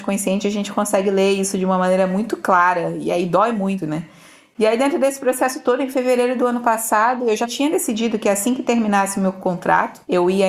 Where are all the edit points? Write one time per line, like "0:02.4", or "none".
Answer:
none